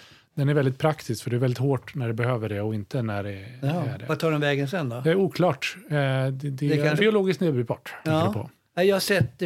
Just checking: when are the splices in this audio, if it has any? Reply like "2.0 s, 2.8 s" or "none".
7.0 s, 8.0 s